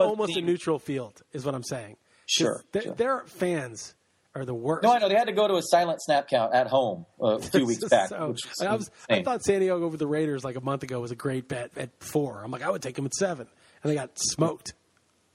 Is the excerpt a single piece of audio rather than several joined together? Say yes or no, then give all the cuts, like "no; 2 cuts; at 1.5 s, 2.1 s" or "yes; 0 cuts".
no; 1 cut; at 11.7 s